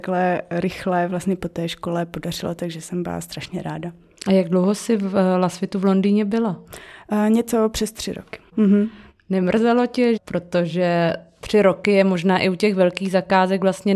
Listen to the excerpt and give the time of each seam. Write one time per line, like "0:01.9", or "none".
0:08.5
0:10.2